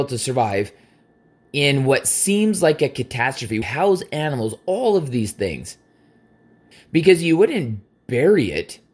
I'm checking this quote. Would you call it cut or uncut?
cut